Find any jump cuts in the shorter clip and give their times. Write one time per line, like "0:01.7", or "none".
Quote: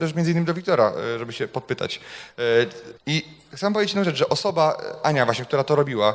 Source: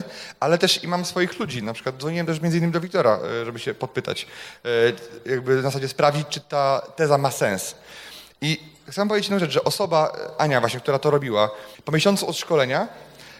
0:03.0